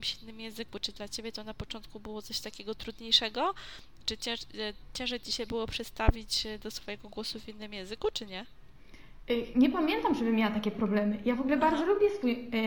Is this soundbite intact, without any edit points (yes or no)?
yes